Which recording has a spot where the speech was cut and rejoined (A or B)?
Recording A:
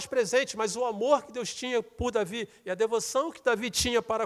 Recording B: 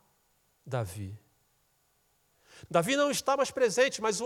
B